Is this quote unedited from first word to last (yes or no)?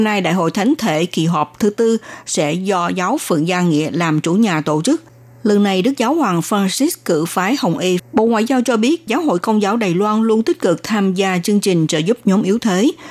no